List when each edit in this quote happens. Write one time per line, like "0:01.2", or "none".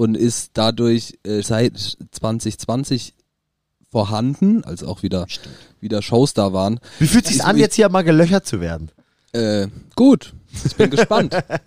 0:01.4
0:04.6
0:06.9

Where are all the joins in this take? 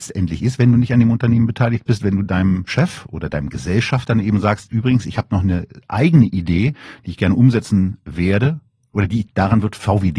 0:09.3

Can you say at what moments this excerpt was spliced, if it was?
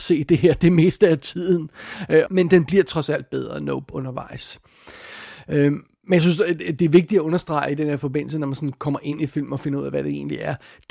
0:02.3

